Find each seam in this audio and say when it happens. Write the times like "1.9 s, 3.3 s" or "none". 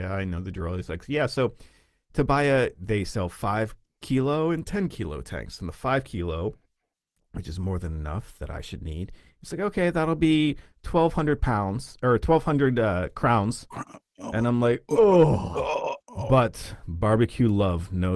16.0 s